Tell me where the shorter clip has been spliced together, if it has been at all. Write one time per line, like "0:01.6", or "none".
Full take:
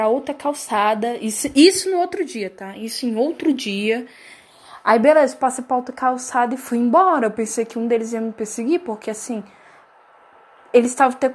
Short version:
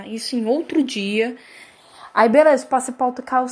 none